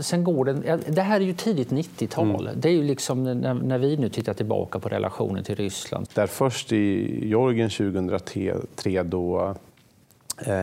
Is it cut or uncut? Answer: cut